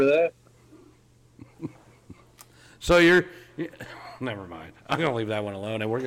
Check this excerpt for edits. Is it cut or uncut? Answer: uncut